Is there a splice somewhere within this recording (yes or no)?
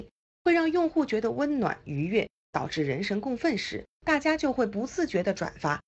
yes